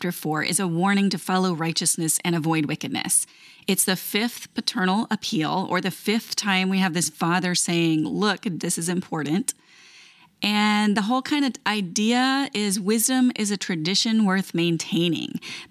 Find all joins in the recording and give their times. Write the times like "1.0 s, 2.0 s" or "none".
8.6 s